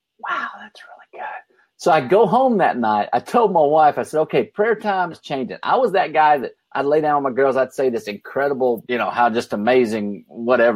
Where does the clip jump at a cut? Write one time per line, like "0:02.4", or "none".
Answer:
0:05.1
0:08.8